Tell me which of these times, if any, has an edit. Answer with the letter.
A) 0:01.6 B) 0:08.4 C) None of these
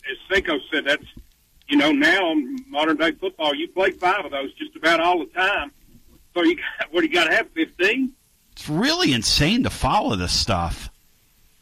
B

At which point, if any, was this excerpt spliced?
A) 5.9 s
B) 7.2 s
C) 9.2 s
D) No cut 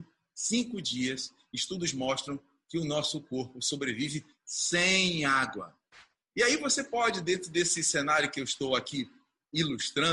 D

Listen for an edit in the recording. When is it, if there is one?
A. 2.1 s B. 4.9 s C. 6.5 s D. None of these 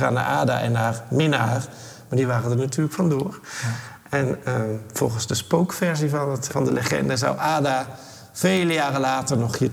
C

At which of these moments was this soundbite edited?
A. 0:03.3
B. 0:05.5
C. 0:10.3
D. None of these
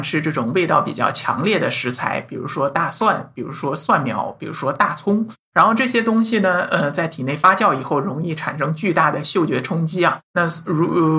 C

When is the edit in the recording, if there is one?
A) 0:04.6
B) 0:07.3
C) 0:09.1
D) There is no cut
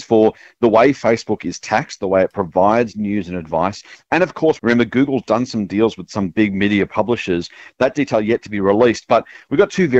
A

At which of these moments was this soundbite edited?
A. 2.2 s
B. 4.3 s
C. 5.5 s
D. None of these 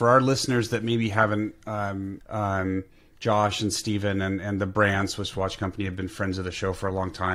A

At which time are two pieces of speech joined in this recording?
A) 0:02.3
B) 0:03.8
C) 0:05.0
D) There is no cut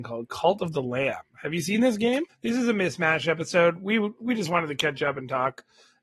A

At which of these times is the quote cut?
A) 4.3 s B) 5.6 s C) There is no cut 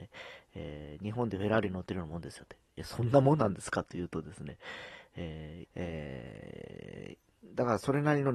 B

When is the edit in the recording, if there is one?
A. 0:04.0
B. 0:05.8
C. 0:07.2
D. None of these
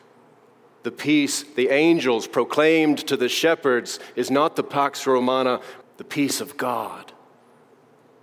B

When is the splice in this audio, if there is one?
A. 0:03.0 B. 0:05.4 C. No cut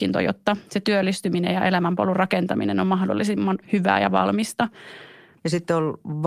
B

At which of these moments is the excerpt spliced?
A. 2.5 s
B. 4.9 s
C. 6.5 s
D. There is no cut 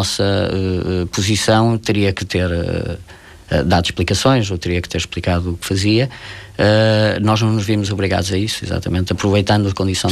D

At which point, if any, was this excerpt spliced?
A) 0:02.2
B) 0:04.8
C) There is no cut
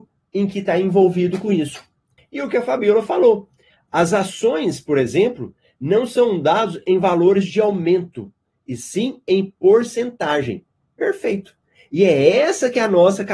A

